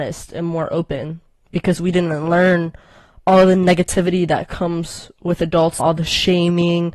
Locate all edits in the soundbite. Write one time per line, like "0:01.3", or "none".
0:05.8

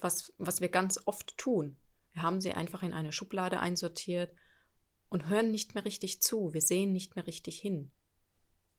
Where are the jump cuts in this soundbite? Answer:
0:02.1

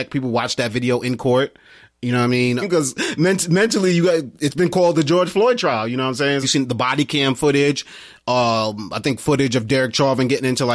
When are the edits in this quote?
0:02.6
0:06.4

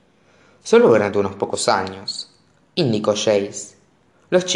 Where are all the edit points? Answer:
none

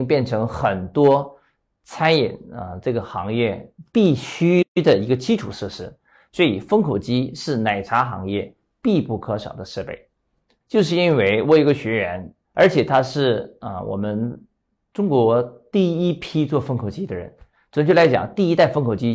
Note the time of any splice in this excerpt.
0:10.6
0:12.4

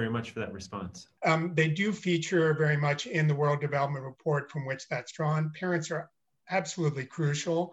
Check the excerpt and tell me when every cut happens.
0:01.2

